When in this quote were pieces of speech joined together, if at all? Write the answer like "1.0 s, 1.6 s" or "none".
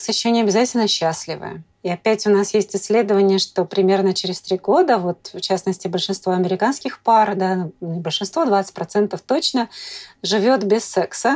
1.7 s